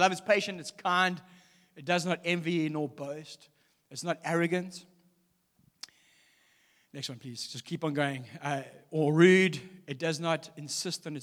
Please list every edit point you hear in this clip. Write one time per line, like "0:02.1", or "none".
none